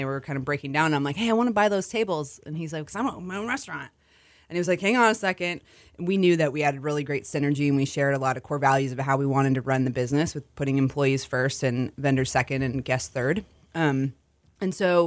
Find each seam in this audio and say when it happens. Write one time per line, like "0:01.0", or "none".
0:02.8